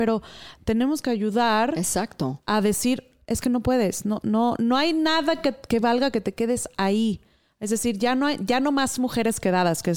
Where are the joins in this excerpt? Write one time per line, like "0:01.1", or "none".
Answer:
none